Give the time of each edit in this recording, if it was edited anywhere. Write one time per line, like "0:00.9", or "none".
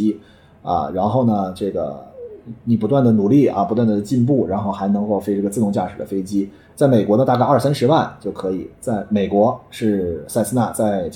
none